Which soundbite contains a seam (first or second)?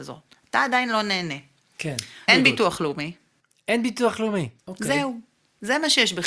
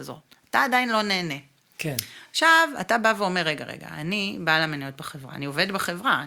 first